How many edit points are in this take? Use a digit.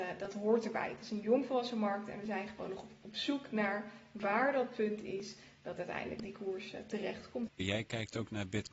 1